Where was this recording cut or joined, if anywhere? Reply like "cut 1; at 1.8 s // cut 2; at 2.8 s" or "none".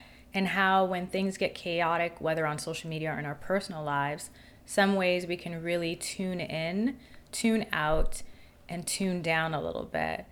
none